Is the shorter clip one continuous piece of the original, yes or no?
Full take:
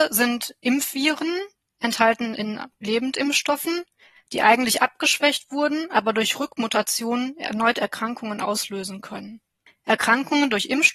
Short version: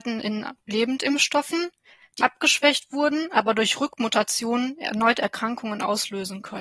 no